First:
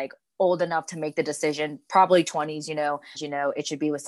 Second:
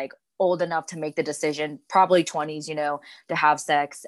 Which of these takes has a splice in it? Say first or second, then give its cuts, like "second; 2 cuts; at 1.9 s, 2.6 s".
first; 1 cut; at 3.2 s